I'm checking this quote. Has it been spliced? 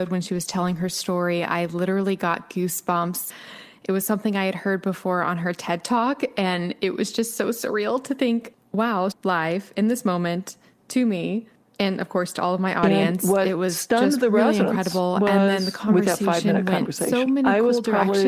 yes; 1 cut; at 9.1 s

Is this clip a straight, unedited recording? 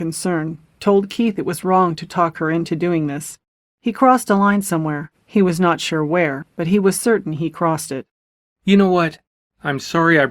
yes; 0 cuts

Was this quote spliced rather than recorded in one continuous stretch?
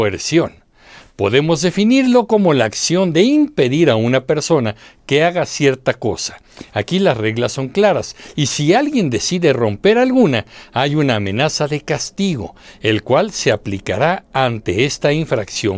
no; 0 cuts

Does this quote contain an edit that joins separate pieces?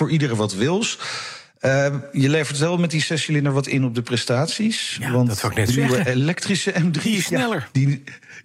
no; 0 cuts

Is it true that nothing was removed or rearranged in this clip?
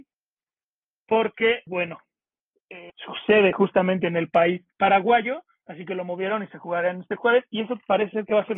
no; 3 cuts; at 1.7 s, 2.9 s, 4.7 s

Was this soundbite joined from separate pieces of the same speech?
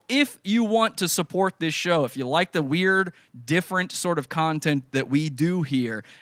no; 0 cuts

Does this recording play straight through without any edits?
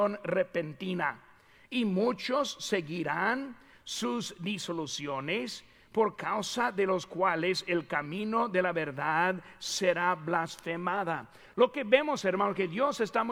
yes; 0 cuts

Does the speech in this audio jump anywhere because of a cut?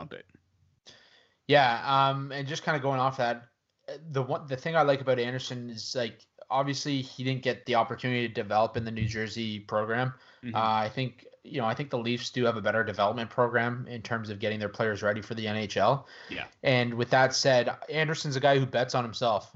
no; 0 cuts

